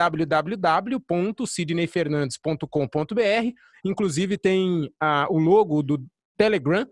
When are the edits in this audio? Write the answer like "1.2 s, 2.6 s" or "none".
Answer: 3.7 s